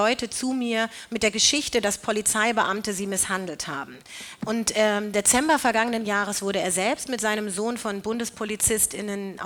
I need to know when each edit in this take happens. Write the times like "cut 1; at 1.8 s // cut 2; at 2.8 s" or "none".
cut 1; at 4.4 s